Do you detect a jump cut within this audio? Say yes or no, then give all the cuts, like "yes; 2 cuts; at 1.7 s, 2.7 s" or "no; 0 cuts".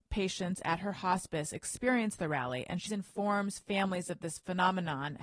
yes; 1 cut; at 2.9 s